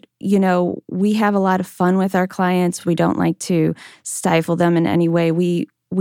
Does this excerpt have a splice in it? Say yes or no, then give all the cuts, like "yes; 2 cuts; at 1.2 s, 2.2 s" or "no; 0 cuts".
no; 0 cuts